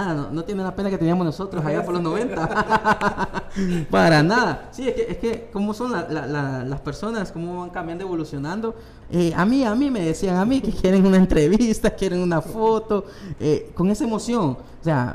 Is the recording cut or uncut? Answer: cut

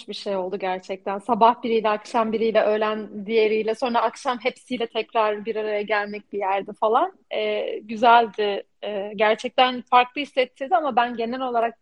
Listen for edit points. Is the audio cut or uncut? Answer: uncut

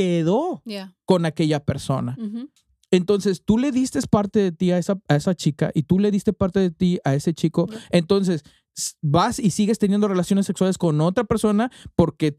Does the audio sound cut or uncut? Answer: uncut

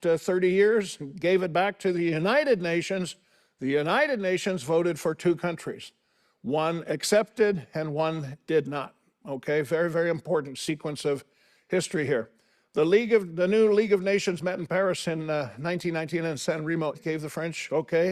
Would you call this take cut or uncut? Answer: cut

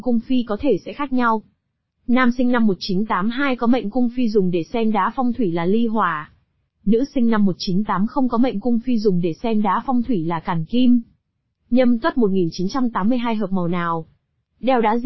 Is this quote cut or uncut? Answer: uncut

